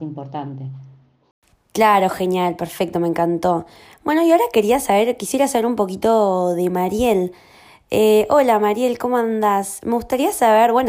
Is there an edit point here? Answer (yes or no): no